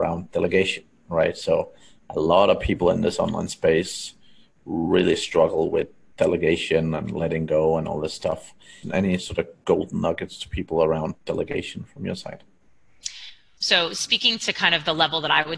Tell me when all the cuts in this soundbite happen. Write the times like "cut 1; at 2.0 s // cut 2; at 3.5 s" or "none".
cut 1; at 8.8 s // cut 2; at 13.6 s